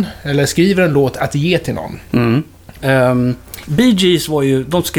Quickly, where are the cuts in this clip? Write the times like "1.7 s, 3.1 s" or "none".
2.8 s